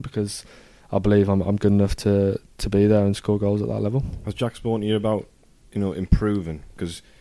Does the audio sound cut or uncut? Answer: cut